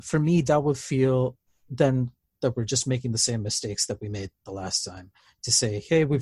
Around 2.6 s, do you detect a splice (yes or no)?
no